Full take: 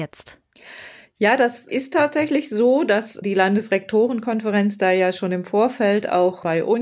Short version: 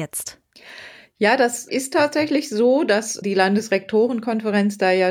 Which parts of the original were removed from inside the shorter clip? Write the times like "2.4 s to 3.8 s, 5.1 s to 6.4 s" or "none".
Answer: none